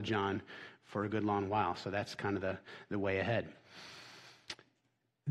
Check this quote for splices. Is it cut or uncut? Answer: uncut